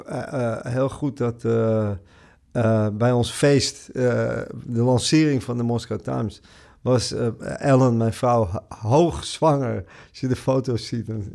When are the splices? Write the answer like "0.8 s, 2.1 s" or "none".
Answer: none